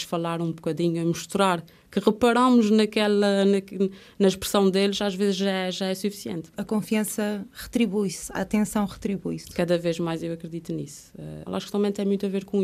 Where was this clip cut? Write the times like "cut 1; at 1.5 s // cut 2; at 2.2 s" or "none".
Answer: cut 1; at 6.5 s // cut 2; at 11.5 s